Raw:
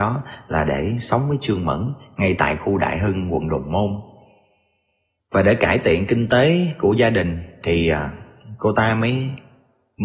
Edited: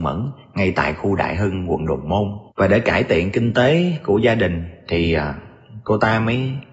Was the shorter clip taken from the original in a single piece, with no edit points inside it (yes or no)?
no